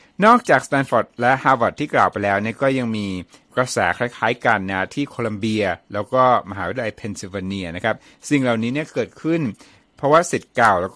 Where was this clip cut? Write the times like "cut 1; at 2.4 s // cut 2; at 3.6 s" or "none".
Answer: none